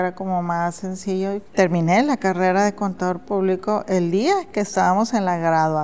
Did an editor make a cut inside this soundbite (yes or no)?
yes